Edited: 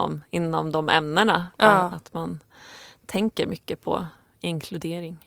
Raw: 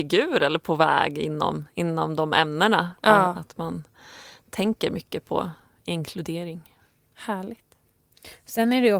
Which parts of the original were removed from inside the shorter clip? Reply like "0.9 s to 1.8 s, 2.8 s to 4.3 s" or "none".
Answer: none